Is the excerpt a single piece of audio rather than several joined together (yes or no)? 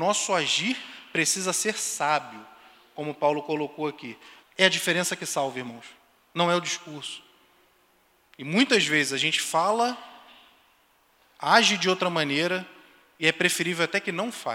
no